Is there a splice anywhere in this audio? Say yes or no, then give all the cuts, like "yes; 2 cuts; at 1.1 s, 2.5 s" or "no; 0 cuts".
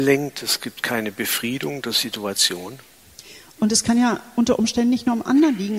no; 0 cuts